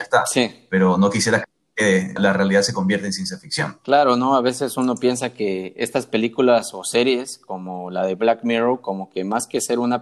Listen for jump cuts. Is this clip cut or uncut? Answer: cut